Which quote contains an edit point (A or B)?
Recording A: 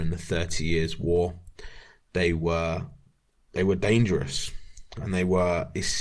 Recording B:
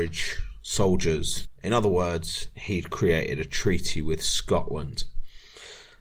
B